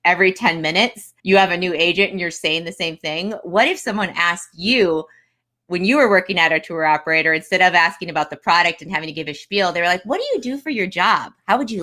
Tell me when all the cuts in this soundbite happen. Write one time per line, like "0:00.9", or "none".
0:01.2